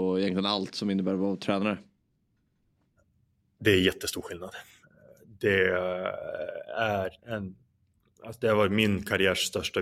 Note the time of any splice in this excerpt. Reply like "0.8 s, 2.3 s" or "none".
7.2 s